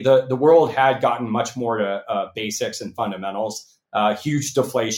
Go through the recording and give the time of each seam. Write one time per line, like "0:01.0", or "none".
0:03.8